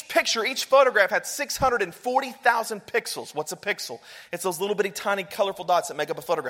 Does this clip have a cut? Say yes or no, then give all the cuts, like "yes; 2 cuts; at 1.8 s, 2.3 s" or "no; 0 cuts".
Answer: no; 0 cuts